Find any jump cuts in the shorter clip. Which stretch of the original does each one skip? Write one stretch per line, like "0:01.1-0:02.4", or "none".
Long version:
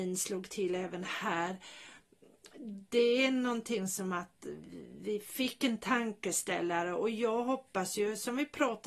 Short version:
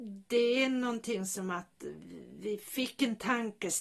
none